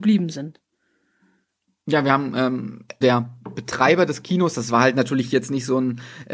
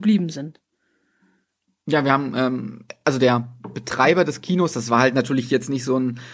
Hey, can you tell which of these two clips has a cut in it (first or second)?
first